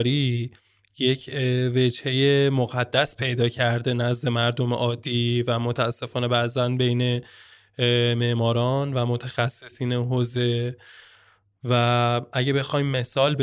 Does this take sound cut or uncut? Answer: uncut